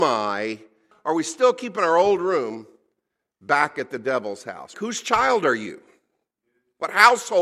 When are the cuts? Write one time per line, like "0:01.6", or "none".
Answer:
0:00.9
0:04.7